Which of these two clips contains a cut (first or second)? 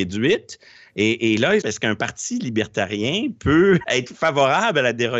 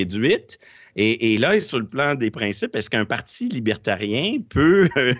first